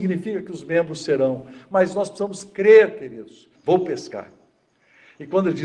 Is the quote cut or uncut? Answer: cut